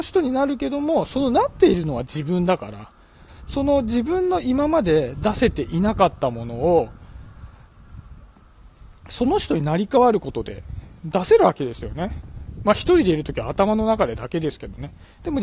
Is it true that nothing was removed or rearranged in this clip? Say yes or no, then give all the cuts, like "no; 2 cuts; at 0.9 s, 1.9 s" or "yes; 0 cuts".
yes; 0 cuts